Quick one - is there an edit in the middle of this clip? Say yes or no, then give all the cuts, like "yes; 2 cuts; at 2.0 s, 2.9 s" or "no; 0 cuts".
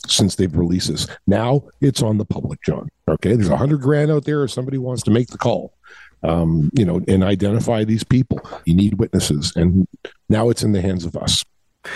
yes; 1 cut; at 8.6 s